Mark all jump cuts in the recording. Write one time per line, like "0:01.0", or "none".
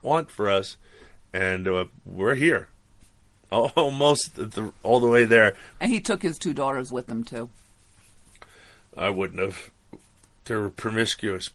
0:05.7